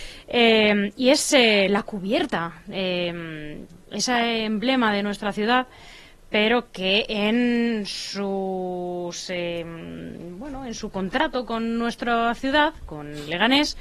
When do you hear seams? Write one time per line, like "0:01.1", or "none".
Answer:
none